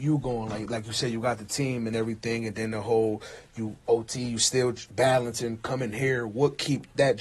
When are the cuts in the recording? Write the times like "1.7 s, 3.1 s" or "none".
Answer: none